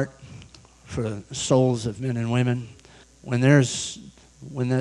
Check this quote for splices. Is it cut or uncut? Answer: cut